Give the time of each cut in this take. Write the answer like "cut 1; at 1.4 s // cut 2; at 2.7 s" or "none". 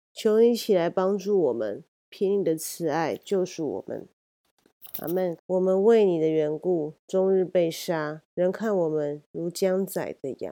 cut 1; at 5.4 s // cut 2; at 8.3 s